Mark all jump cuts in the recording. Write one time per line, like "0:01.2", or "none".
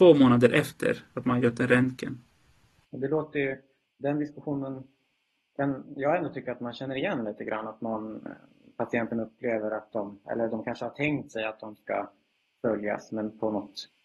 0:02.8